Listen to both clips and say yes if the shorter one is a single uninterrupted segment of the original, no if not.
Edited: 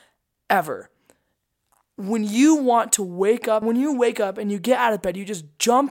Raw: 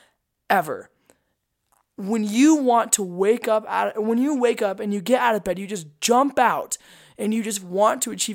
no